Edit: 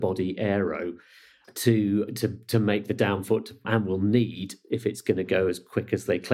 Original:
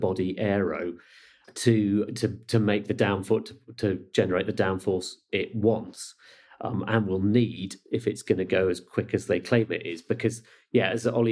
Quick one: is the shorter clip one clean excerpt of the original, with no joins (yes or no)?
no